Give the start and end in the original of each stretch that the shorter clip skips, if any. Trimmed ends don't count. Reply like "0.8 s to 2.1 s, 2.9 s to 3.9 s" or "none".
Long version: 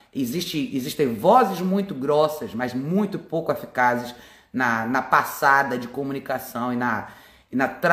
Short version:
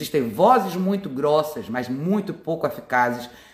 none

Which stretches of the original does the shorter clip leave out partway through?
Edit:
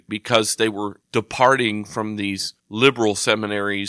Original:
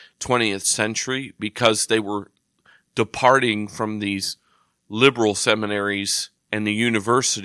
2.3 s to 2.8 s, 4.4 s to 4.8 s

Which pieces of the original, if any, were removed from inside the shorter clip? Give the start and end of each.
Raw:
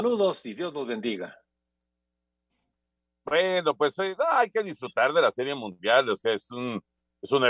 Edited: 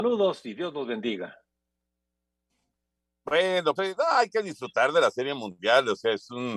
3.8 s to 4.0 s

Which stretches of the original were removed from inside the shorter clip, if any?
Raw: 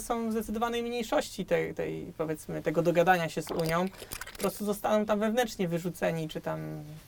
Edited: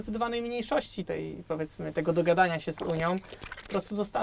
1.5 s to 1.7 s

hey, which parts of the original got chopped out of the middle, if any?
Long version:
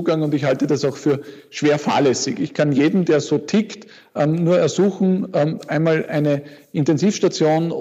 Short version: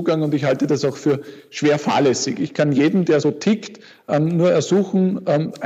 3.2 s to 3.3 s

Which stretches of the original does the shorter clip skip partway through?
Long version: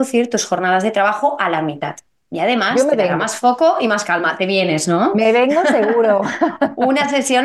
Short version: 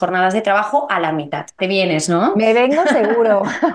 2.1 s to 4.4 s

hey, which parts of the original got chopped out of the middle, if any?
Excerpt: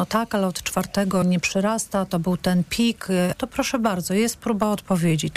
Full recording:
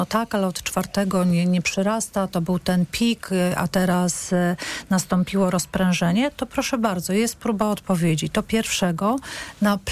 1.2 s to 1.4 s, 3.5 s to 6.3 s

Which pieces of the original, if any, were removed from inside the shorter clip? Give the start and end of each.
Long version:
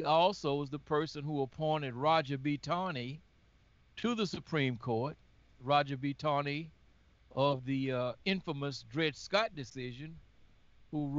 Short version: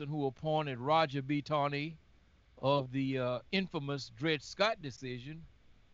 2.6 s to 6.2 s

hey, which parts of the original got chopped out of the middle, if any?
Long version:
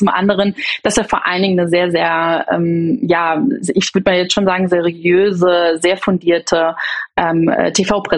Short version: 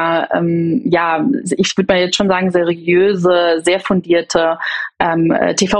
none

